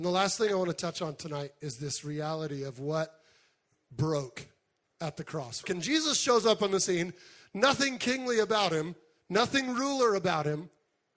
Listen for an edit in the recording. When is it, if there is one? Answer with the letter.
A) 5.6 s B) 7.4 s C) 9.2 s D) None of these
A